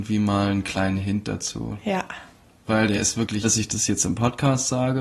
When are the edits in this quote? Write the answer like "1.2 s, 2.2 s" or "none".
3.4 s